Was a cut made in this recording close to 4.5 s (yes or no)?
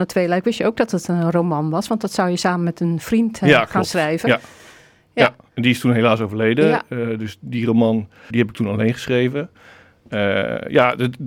no